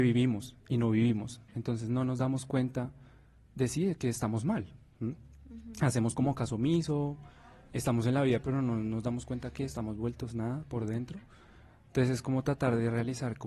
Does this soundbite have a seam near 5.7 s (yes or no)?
no